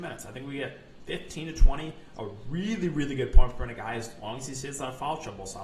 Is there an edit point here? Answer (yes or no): no